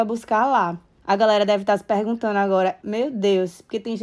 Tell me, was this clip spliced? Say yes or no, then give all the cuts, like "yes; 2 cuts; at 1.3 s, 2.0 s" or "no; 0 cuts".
yes; 2 cuts; at 1.0 s, 2.8 s